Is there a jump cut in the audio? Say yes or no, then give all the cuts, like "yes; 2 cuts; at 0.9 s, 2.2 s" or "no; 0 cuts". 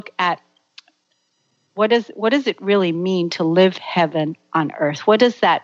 no; 0 cuts